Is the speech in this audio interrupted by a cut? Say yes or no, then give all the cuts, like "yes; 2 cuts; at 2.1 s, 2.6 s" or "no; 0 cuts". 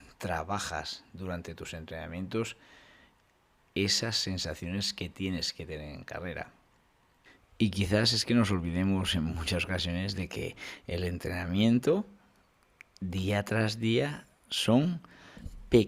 no; 0 cuts